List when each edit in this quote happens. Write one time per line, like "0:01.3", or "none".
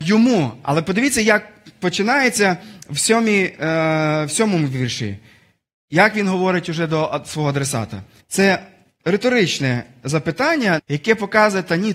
0:08.2
0:10.8